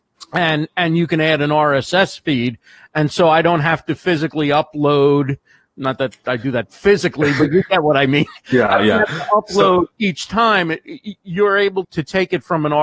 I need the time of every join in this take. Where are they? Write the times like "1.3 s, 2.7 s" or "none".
11.8 s